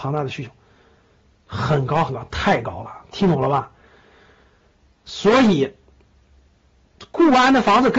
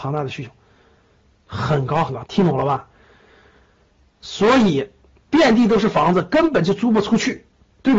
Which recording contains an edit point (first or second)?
second